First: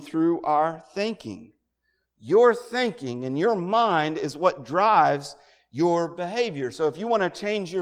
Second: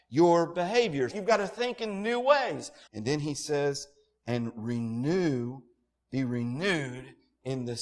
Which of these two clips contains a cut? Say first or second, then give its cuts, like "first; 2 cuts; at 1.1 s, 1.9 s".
second; 2 cuts; at 1.1 s, 2.9 s